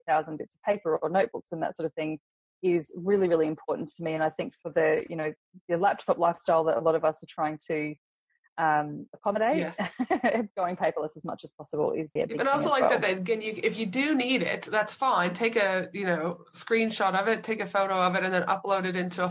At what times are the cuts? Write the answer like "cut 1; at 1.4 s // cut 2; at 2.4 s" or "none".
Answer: cut 1; at 12.2 s